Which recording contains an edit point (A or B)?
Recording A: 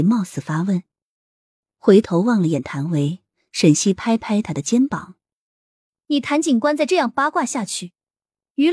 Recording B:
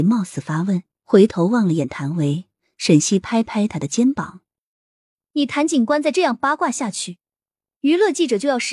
B